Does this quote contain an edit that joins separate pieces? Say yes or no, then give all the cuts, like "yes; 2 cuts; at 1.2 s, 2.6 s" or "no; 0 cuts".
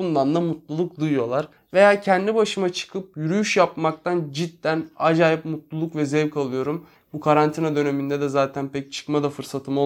yes; 2 cuts; at 1.6 s, 6.9 s